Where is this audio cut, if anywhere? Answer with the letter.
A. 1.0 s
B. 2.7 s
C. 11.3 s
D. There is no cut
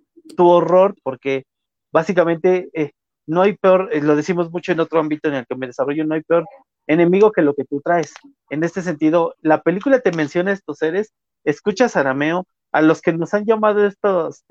A